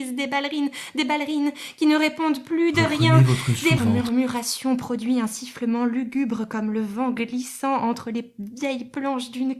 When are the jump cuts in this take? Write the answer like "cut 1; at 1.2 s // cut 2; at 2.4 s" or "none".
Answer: cut 1; at 3.8 s